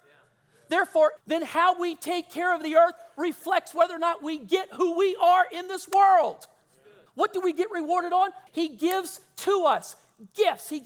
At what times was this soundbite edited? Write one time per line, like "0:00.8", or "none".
0:01.2
0:07.1
0:08.5